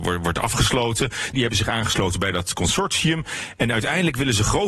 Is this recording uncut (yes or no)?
no